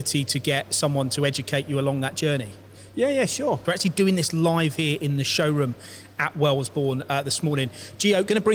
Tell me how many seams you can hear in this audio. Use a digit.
1